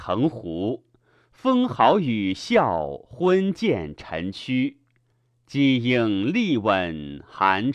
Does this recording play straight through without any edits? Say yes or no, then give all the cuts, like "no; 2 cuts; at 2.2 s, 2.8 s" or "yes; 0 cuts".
yes; 0 cuts